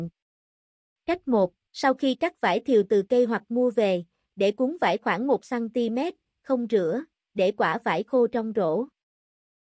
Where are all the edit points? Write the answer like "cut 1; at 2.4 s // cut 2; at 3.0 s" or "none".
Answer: cut 1; at 1.7 s